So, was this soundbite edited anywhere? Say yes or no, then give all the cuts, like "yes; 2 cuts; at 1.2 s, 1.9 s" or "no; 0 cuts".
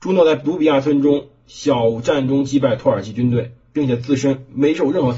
no; 0 cuts